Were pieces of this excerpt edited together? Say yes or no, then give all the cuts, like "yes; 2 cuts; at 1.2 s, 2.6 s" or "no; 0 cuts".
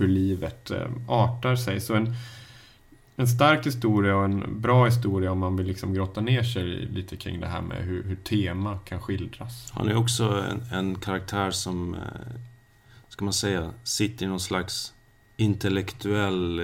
no; 0 cuts